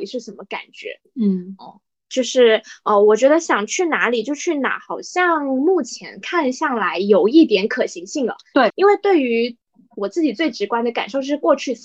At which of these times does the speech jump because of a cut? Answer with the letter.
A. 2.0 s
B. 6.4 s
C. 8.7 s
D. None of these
C